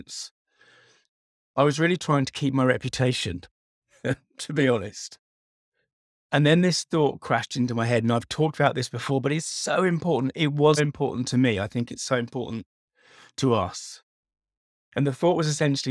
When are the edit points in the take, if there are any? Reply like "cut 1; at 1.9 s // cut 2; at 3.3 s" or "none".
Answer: cut 1; at 10.8 s

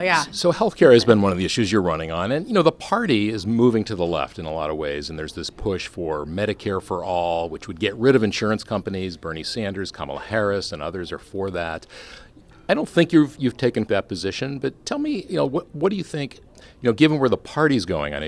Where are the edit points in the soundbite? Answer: cut 1; at 13.9 s

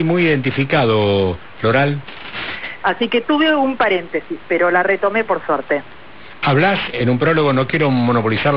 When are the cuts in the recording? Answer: cut 1; at 2.8 s // cut 2; at 6.9 s

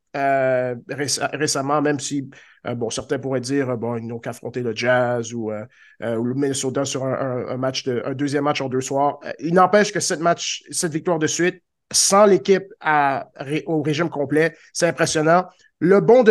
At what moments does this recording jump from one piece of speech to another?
none

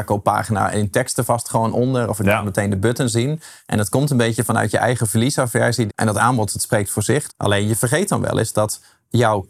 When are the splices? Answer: cut 1; at 5.9 s // cut 2; at 7.3 s

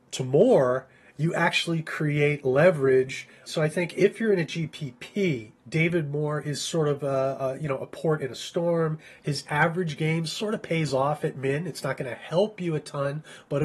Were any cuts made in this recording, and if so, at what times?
cut 1; at 3.5 s // cut 2; at 5.6 s // cut 3; at 9.2 s

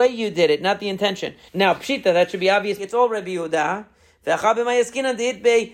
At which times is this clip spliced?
cut 1; at 1.5 s // cut 2; at 2.8 s

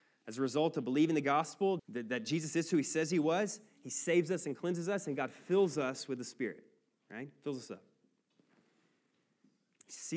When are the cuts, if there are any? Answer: cut 1; at 1.8 s

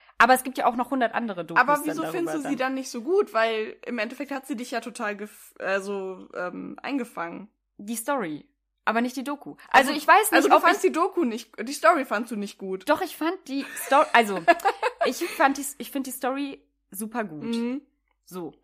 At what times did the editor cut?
none

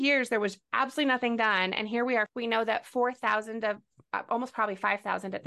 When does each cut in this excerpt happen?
cut 1; at 2.3 s

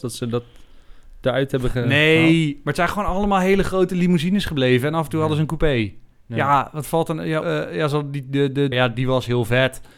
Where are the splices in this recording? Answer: cut 1; at 7.4 s // cut 2; at 8.7 s

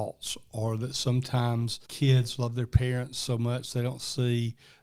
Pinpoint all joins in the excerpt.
cut 1; at 1.8 s

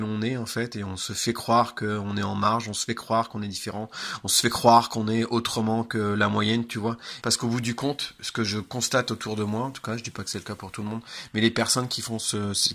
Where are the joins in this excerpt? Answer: cut 1; at 7.2 s

